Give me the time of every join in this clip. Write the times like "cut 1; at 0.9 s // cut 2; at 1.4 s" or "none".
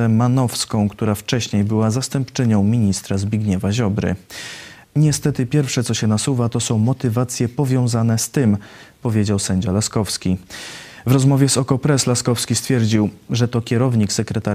cut 1; at 4.8 s // cut 2; at 13.3 s